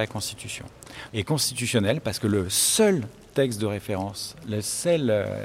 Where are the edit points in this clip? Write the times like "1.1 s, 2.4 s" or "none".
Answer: 1.1 s